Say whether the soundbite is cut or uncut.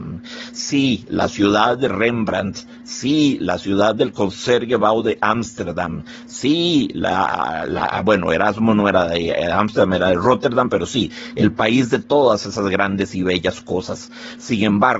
uncut